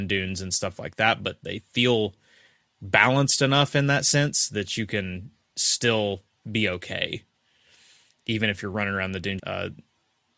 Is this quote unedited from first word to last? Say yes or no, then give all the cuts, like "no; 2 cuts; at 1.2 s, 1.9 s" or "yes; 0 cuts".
no; 1 cut; at 9.4 s